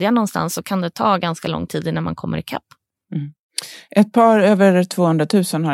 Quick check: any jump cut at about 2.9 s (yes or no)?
no